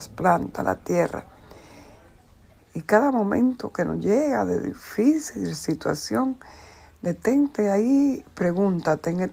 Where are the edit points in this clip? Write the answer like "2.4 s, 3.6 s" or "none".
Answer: 2.6 s